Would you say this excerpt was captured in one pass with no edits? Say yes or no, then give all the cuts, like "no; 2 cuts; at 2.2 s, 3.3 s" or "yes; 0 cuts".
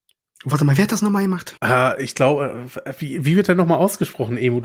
no; 1 cut; at 1.6 s